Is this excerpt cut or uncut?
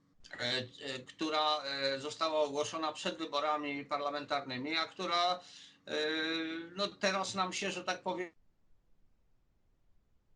uncut